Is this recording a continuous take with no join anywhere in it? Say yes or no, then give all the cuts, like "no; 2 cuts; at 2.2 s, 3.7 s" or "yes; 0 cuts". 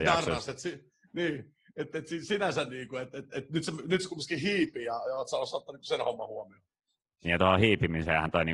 yes; 0 cuts